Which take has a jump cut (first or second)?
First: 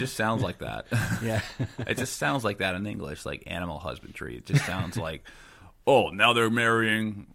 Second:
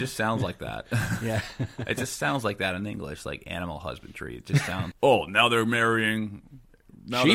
second